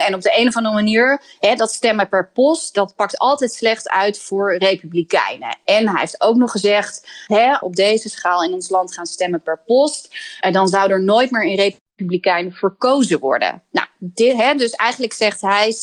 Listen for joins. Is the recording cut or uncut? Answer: cut